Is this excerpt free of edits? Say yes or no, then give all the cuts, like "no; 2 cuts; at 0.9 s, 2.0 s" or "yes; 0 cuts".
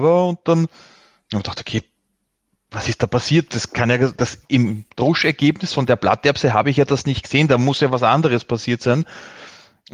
yes; 0 cuts